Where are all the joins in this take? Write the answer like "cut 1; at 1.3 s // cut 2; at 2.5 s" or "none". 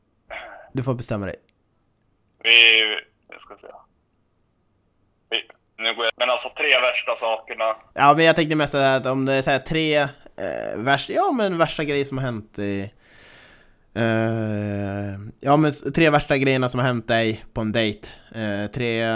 cut 1; at 5.8 s